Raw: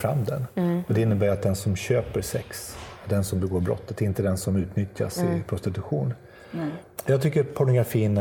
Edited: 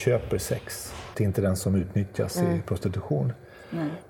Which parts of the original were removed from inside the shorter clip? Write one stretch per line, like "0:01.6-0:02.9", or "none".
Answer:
0:03.0-0:04.0